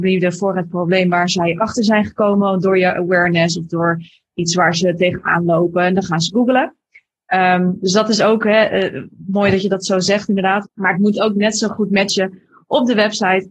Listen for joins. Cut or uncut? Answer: cut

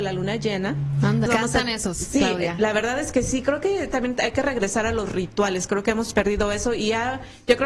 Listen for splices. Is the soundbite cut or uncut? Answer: cut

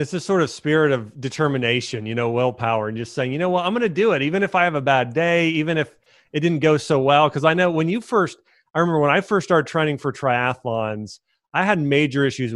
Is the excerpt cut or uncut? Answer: uncut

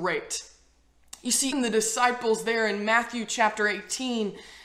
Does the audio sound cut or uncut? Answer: cut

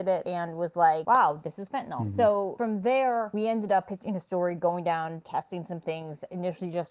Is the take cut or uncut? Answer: uncut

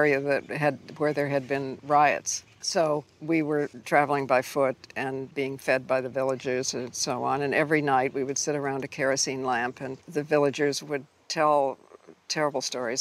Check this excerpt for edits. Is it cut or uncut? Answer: cut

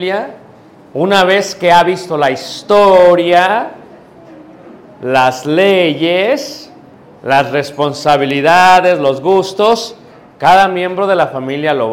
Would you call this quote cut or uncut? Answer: uncut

